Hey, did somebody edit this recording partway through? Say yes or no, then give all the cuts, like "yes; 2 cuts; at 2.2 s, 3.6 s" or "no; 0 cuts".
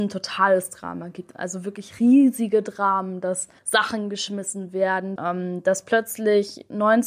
yes; 2 cuts; at 3.6 s, 5.2 s